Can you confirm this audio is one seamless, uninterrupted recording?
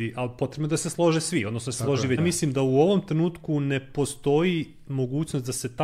no; 1 cut; at 2.2 s

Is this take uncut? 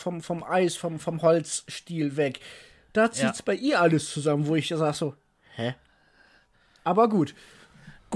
yes; 0 cuts

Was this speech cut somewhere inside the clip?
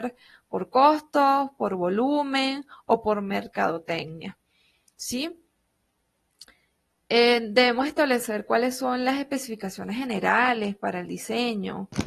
no; 0 cuts

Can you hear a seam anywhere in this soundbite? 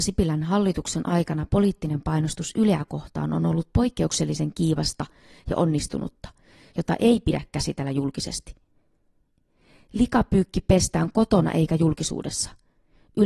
yes; 1 cut; at 6.7 s

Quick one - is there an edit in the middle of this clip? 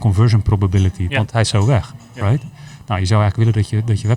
yes; 1 cut; at 1.1 s

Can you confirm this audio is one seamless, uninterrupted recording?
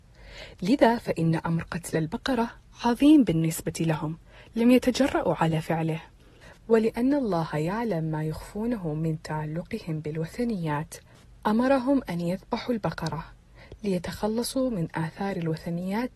no; 1 cut; at 6.6 s

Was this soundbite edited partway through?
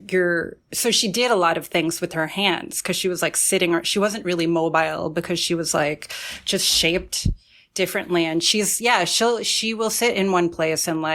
no; 0 cuts

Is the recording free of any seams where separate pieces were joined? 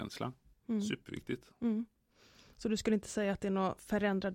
yes; 0 cuts

